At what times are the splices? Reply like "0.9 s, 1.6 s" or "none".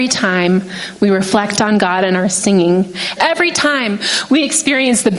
3.2 s

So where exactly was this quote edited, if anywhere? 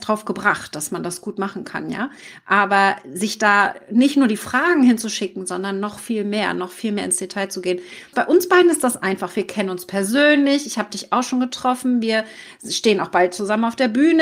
8.1 s

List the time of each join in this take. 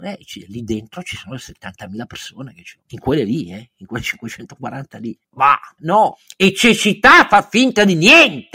5.8 s

